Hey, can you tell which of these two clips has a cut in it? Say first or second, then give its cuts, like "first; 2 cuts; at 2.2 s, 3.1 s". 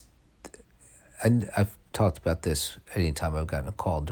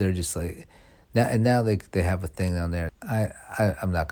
second; 1 cut; at 2.9 s